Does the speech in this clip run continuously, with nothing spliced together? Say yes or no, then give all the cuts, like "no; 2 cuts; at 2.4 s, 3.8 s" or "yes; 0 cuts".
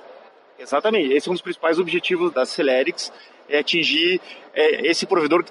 no; 1 cut; at 2.3 s